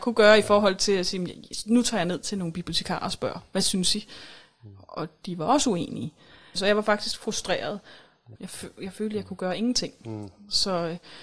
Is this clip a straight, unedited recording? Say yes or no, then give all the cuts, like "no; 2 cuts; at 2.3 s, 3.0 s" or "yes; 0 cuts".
no; 2 cuts; at 6.5 s, 8.3 s